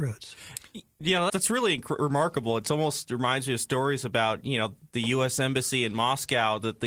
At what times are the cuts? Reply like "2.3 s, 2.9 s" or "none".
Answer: 1.3 s